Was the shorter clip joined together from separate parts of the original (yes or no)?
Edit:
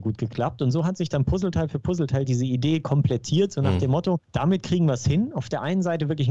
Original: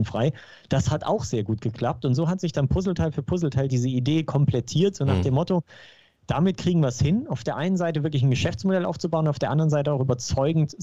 yes